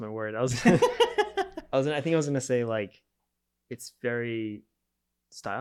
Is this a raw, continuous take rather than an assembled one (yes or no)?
yes